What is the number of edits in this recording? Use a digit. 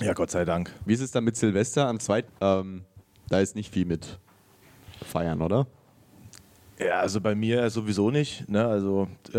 1